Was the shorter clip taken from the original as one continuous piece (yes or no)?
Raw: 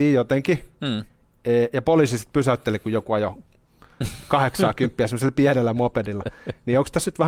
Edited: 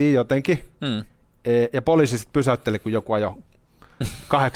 yes